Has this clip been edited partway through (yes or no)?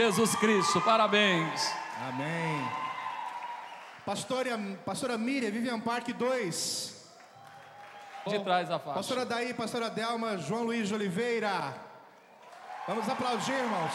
yes